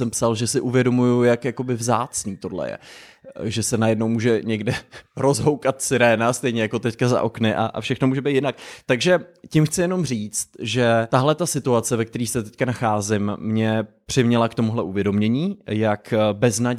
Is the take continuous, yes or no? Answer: yes